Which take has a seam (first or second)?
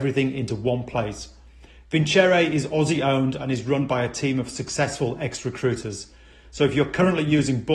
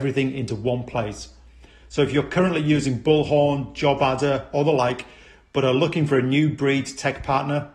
second